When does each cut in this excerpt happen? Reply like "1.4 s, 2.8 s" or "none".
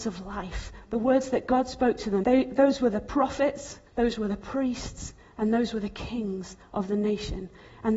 2.2 s, 3.9 s